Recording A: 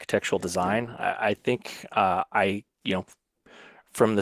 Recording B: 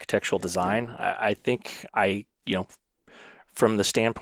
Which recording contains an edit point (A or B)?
B